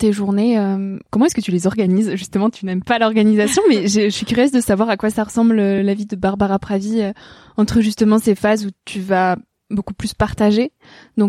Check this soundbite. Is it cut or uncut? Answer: uncut